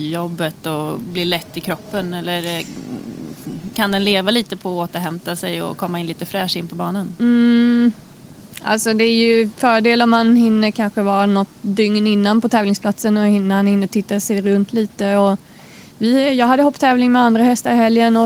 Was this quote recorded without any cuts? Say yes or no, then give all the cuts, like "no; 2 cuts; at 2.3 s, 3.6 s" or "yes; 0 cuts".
no; 1 cut; at 3.7 s